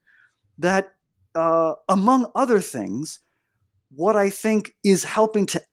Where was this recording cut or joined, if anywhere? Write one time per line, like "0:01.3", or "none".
none